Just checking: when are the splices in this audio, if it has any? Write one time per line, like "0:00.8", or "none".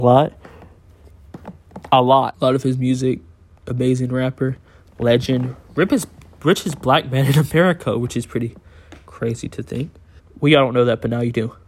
0:02.3
0:10.2